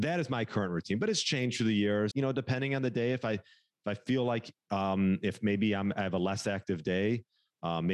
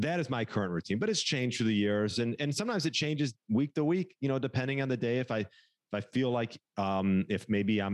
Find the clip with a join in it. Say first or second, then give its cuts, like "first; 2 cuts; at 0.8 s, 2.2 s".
first; 1 cut; at 2.1 s